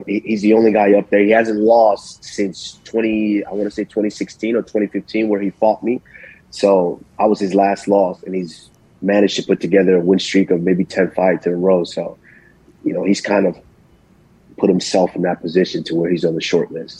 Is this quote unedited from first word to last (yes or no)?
yes